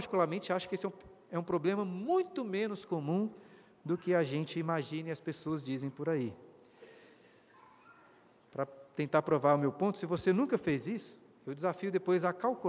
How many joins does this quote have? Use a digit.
0